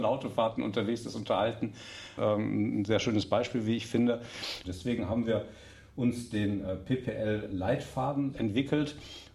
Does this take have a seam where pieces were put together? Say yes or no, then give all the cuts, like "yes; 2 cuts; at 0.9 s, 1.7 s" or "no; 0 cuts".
yes; 3 cuts; at 2.2 s, 4.6 s, 8.3 s